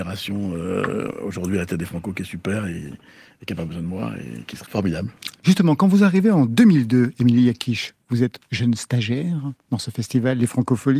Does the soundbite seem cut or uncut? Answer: cut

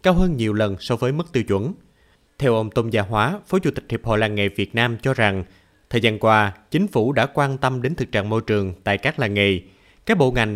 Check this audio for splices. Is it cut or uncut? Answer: uncut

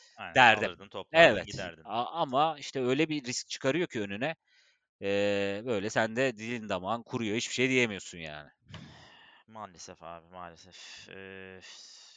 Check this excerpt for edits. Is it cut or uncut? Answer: uncut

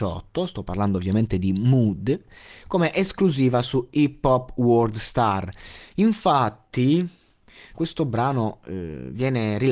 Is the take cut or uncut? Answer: cut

